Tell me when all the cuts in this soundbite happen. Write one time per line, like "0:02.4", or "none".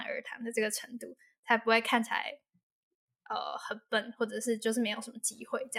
none